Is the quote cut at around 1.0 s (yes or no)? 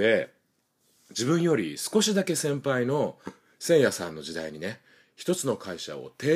no